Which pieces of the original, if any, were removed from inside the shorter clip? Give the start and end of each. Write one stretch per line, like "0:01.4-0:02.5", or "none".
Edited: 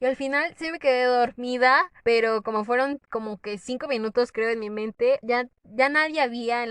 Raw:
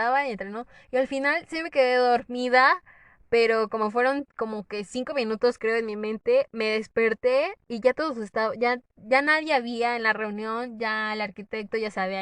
0:02.9-0:03.3
0:06.5-0:08.6